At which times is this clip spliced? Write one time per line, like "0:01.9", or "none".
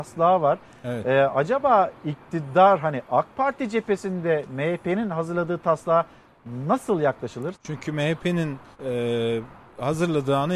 0:07.5
0:08.7